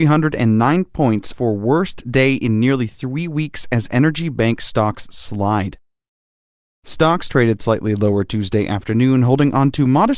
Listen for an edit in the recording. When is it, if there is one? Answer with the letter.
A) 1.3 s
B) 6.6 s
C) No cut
A